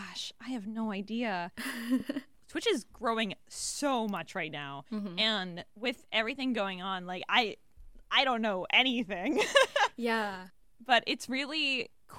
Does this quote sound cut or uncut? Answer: uncut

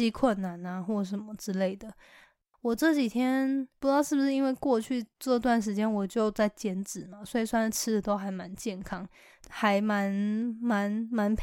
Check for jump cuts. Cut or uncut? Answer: cut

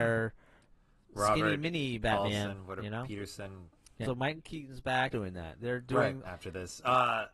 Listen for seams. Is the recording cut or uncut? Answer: cut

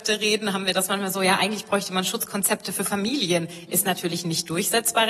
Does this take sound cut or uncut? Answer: uncut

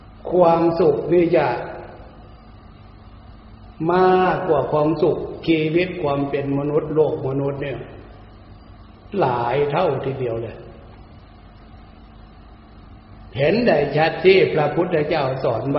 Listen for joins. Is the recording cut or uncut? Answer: uncut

